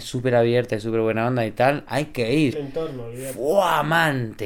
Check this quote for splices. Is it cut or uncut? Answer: cut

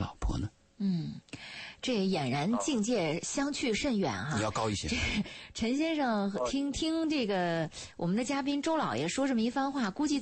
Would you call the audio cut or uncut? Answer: uncut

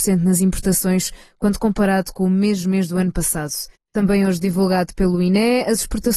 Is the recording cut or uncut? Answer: cut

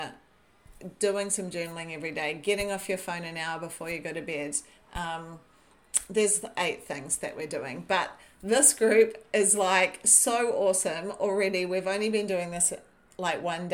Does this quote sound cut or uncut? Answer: uncut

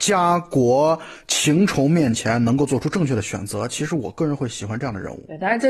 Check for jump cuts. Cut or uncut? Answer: uncut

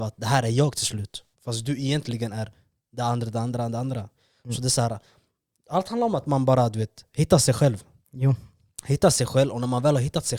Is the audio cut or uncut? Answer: cut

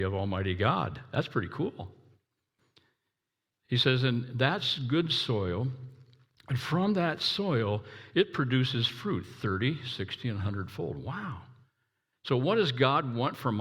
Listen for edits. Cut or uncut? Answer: uncut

